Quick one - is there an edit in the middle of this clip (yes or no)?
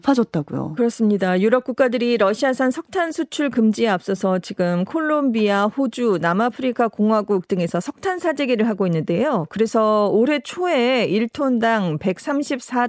no